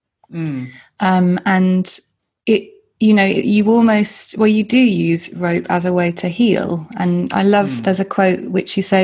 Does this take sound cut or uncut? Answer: uncut